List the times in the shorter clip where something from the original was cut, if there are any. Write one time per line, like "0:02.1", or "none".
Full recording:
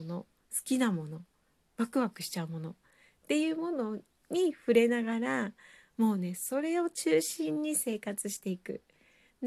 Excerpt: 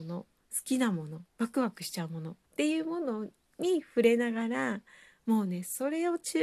0:01.3
0:02.4